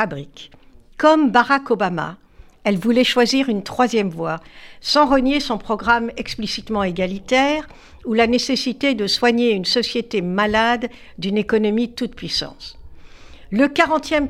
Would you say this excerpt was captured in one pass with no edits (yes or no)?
yes